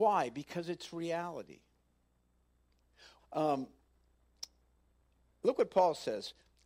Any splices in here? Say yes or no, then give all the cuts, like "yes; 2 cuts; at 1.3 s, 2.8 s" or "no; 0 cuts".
yes; 1 cut; at 3.2 s